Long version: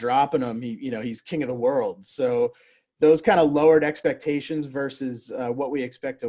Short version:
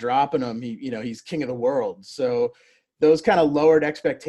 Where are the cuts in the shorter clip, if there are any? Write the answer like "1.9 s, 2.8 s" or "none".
none